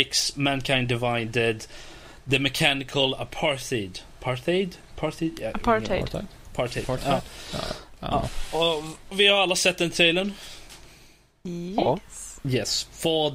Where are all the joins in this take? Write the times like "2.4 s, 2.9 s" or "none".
9.1 s